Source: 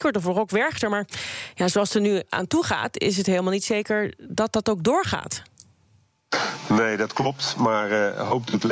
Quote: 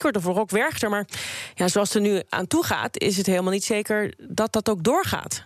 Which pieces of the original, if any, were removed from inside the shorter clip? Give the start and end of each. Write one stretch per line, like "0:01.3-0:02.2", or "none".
none